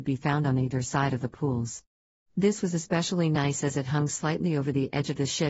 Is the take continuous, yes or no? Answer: no